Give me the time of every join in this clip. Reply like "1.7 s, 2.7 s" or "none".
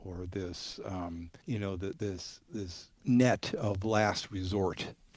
1.4 s, 3.0 s